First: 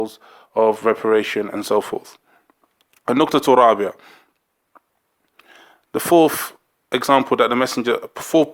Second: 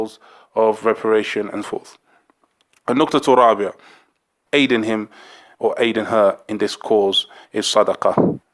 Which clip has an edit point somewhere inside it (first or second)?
second